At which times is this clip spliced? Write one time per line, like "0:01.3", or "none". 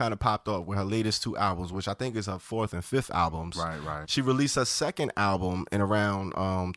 0:04.0